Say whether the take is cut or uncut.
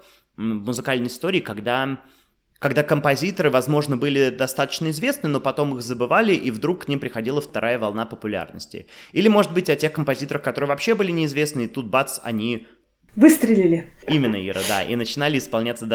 uncut